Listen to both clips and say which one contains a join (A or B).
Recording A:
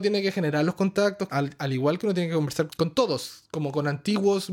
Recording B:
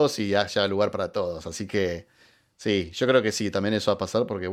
A